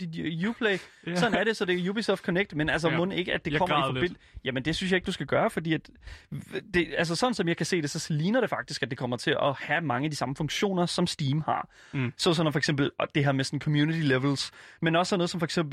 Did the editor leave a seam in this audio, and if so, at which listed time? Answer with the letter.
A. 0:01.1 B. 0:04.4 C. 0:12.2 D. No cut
D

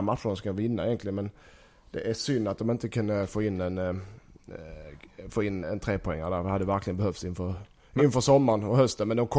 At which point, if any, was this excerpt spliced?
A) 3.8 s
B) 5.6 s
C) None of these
B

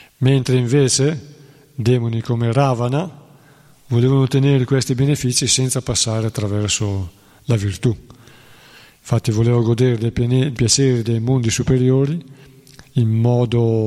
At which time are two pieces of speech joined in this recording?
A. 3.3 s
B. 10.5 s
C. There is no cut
B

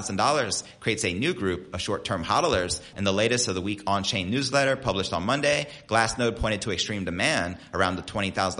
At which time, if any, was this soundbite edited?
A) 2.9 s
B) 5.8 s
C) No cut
A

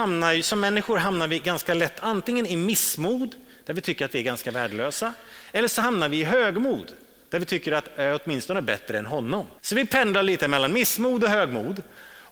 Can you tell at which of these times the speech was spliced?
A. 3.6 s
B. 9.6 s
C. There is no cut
B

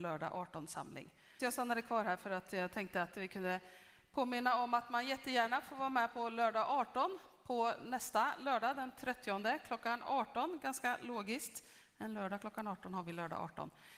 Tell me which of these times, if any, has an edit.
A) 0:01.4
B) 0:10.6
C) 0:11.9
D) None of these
A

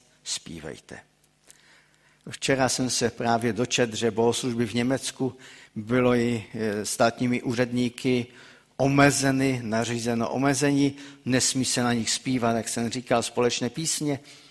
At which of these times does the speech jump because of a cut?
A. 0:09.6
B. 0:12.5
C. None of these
C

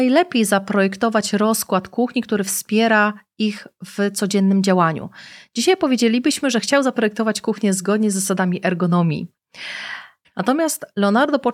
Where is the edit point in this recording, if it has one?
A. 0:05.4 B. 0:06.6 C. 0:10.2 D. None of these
C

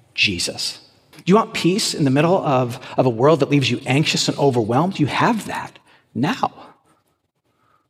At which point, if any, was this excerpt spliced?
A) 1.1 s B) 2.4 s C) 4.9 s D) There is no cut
A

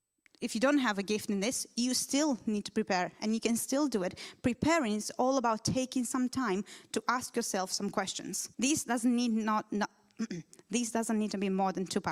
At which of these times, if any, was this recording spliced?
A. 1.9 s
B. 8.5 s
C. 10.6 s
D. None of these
B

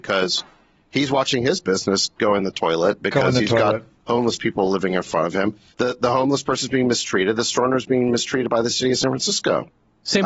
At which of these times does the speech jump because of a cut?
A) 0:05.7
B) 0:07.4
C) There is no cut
A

